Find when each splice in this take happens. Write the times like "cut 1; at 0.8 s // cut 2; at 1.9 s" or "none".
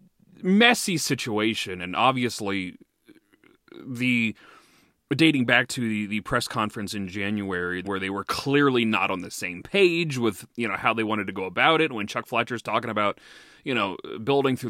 cut 1; at 7.8 s